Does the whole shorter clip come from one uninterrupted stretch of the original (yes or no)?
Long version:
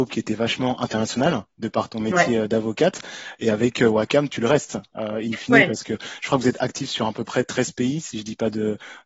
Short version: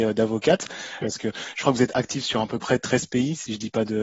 no